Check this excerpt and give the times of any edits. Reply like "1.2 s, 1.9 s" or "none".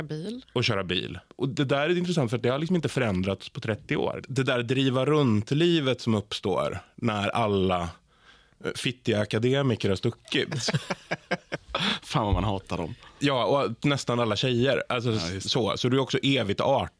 none